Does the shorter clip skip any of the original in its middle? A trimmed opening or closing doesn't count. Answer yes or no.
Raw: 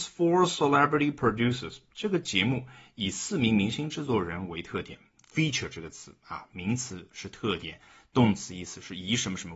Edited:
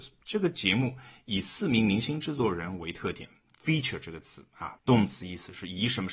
yes